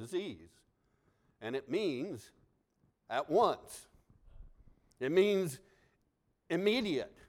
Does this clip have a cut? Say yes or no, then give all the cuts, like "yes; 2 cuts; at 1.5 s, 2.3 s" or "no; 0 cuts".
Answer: no; 0 cuts